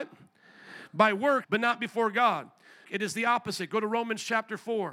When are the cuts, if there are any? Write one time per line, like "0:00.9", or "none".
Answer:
0:01.4
0:02.8